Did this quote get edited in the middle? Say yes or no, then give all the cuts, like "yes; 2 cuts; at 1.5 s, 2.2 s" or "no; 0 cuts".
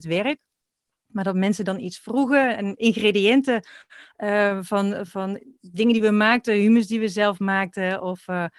no; 0 cuts